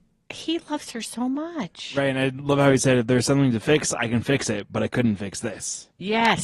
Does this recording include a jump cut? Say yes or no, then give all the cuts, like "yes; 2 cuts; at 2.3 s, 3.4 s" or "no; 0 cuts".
no; 0 cuts